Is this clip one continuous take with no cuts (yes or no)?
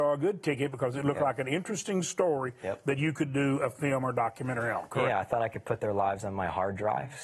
yes